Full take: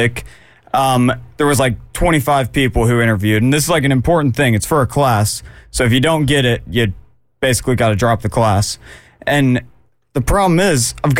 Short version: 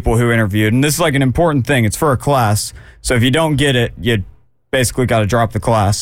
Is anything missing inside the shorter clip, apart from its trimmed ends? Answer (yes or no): no